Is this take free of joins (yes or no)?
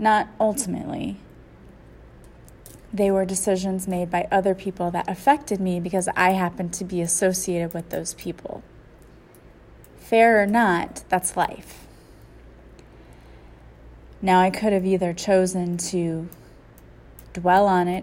yes